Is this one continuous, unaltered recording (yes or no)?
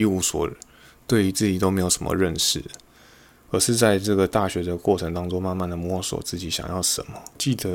yes